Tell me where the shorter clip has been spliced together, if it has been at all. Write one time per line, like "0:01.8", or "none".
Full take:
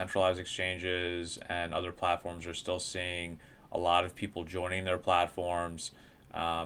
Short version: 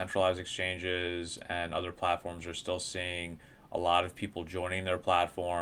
none